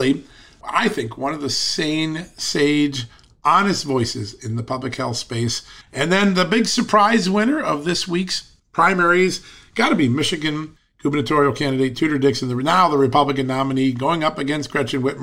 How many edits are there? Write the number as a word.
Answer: one